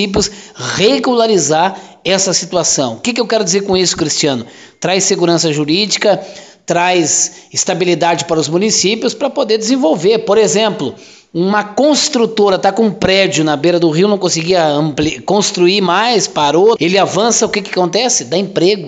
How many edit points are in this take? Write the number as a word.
one